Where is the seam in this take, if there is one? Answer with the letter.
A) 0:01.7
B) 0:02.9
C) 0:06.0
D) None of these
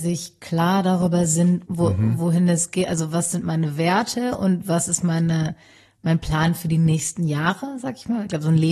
A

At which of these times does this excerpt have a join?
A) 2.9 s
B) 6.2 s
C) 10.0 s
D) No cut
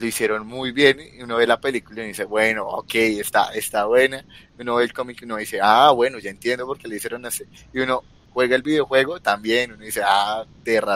D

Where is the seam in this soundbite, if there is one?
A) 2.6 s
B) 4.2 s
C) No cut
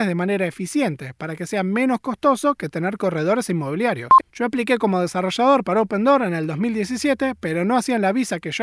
B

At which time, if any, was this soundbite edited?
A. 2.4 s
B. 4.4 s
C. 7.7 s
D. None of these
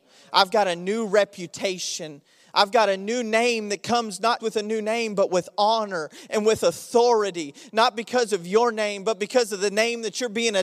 B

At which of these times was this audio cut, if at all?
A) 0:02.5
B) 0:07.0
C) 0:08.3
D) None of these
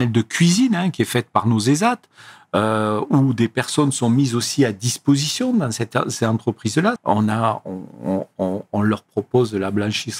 B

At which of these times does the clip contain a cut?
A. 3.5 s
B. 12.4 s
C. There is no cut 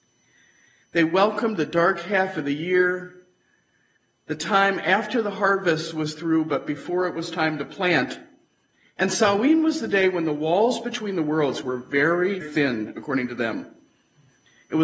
B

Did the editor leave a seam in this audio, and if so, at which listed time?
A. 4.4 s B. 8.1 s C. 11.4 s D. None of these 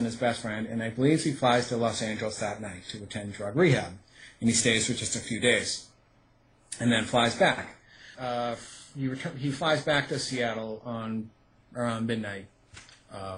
B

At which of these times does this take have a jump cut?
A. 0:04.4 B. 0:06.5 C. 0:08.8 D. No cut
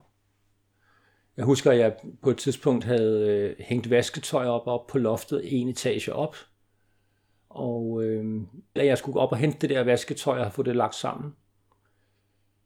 C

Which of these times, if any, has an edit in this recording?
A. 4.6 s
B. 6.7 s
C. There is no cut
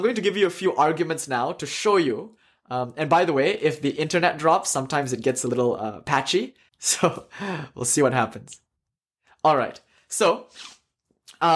B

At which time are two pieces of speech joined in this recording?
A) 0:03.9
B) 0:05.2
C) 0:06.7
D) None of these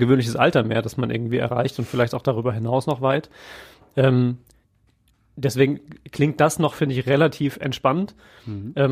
D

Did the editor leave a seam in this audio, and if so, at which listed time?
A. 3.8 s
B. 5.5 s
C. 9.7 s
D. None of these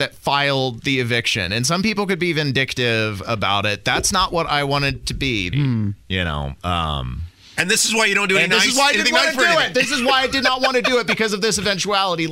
B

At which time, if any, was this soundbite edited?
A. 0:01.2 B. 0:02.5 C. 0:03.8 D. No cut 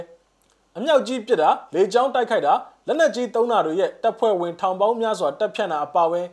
D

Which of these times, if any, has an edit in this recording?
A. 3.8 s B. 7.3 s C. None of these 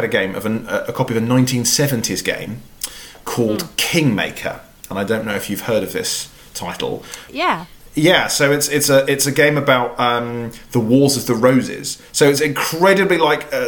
B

